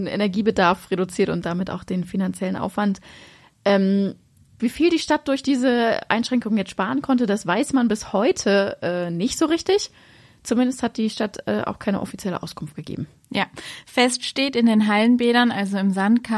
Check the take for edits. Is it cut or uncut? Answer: cut